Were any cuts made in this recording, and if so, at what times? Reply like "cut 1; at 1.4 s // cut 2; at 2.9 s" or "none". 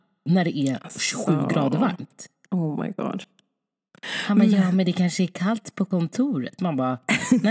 none

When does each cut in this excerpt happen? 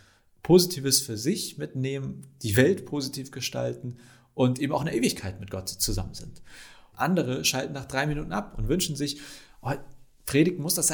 cut 1; at 6.9 s

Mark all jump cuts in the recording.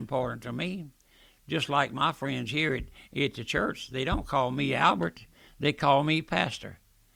none

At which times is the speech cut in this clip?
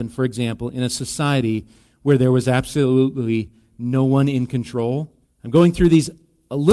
cut 1; at 5.2 s

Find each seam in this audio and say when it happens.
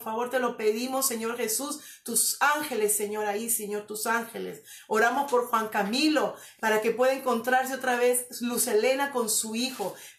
cut 1; at 6.6 s

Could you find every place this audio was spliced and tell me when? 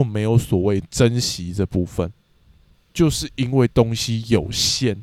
cut 1; at 2.7 s

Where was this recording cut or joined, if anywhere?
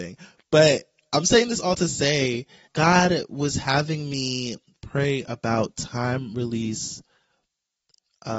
cut 1; at 2.7 s

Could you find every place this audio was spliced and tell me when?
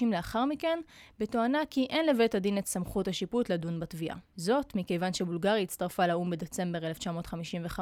none

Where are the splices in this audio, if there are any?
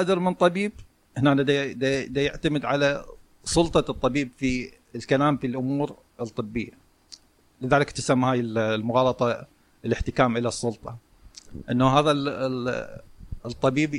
none

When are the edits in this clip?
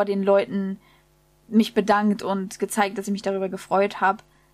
none

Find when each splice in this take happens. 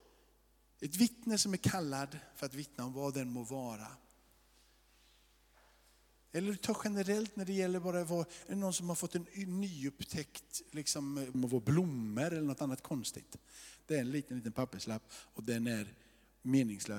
cut 1; at 11.3 s // cut 2; at 13.8 s

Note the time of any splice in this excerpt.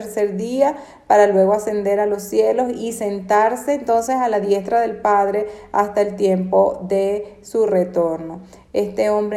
none

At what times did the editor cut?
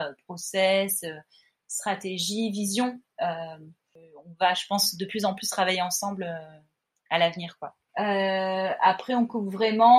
cut 1; at 7.9 s

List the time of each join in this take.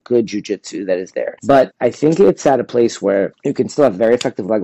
cut 1; at 1.4 s

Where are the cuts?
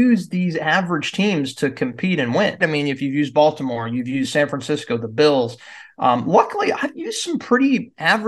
cut 1; at 2.6 s

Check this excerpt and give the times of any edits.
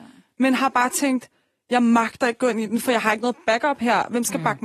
none

